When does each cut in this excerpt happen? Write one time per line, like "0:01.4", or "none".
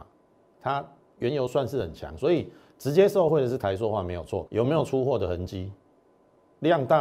0:04.5